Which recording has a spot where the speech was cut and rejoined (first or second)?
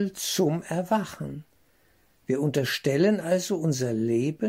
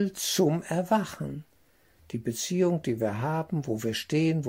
second